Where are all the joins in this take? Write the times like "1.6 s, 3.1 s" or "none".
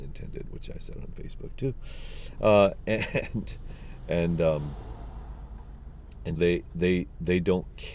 6.4 s